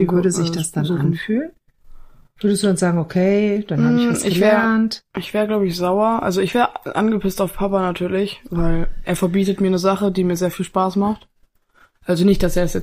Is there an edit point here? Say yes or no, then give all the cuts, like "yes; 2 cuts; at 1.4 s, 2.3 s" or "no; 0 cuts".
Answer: no; 0 cuts